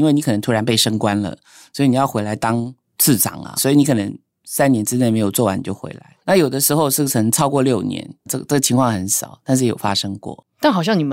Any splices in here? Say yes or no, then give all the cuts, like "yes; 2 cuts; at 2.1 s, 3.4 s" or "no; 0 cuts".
yes; 3 cuts; at 3.6 s, 6.2 s, 8.3 s